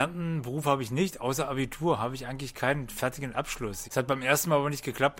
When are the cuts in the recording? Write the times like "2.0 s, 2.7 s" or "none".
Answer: 3.8 s